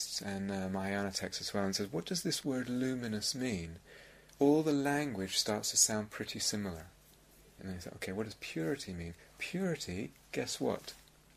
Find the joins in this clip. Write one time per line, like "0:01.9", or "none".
0:04.3
0:07.6